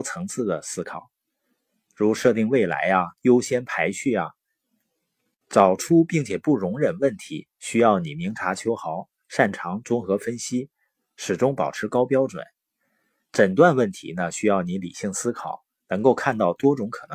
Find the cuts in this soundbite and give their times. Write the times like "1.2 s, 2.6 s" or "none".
none